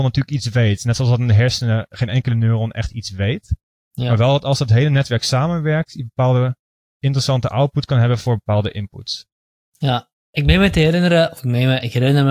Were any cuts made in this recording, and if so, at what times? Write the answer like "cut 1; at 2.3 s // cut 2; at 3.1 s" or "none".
none